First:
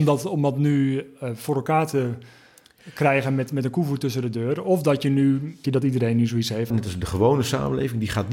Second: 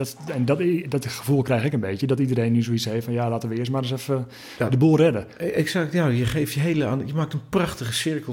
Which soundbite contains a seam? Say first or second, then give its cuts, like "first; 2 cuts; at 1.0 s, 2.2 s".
first; 2 cuts; at 5.6 s, 6.7 s